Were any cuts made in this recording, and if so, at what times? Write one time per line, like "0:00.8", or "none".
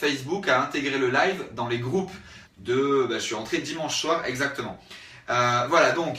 0:02.4